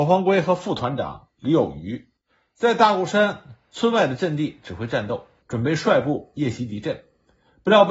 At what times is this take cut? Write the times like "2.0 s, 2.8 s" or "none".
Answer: 5.4 s